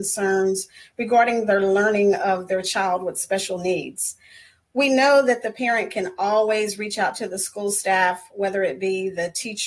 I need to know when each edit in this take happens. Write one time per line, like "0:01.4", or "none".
none